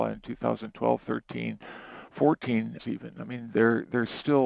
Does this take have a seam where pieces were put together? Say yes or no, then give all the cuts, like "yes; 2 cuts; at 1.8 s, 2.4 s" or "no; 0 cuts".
yes; 1 cut; at 2.8 s